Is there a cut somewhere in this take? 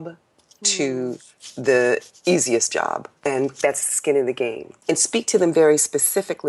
yes; 2 cuts; at 3.2 s, 4.8 s

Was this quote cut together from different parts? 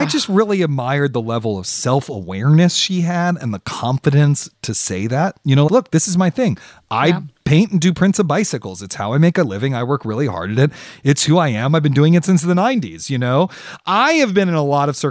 yes; 1 cut; at 5.7 s

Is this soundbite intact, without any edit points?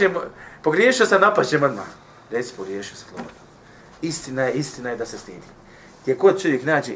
yes; 0 cuts

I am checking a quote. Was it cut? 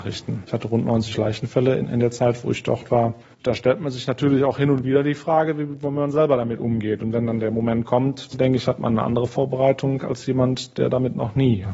yes; 1 cut; at 8.3 s

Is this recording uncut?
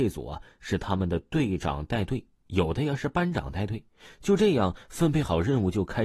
yes; 0 cuts

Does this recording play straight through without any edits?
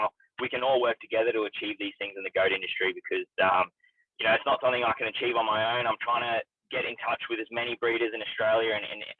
yes; 0 cuts

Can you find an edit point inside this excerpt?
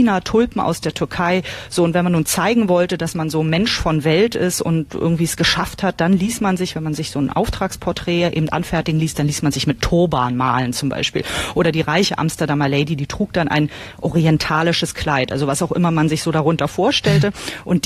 no; 0 cuts

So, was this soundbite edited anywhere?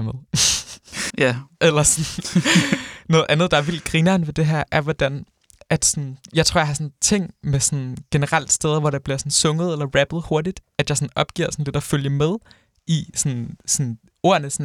yes; 1 cut; at 1.1 s

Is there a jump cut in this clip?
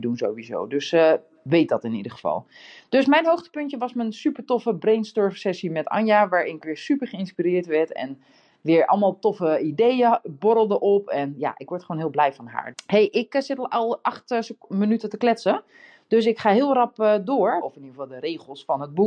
yes; 2 cuts; at 12.7 s, 17.6 s

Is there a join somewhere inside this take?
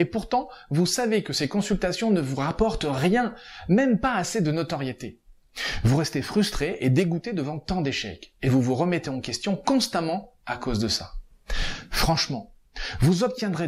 no; 0 cuts

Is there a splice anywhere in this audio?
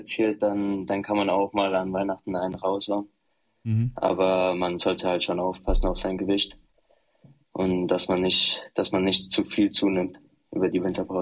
no; 0 cuts

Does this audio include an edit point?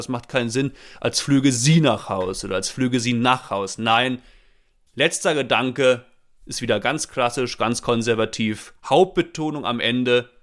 no; 0 cuts

